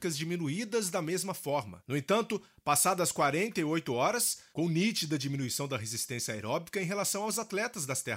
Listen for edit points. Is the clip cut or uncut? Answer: cut